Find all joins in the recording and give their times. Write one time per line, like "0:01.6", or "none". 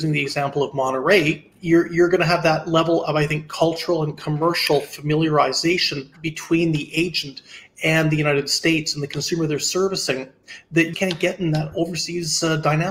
0:01.5
0:10.9